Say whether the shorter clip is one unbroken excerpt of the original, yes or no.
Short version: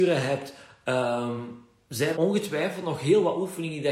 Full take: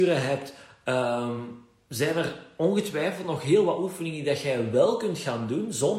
no